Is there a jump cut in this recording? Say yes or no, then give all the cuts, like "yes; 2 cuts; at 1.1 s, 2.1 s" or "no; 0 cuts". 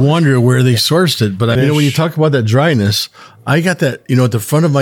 yes; 1 cut; at 1.6 s